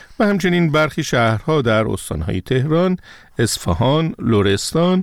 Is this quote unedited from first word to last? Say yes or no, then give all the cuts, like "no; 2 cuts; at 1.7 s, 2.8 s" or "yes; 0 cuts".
yes; 0 cuts